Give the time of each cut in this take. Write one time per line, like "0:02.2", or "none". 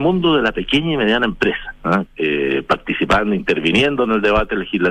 0:02.1